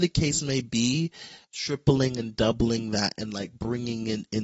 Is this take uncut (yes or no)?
no